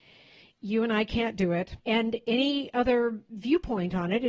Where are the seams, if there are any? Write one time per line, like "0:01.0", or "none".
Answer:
0:01.8